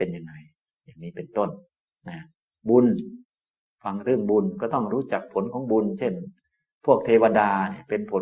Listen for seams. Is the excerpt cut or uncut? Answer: uncut